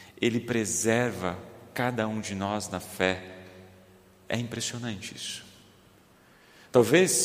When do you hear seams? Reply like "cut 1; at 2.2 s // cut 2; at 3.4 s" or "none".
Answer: none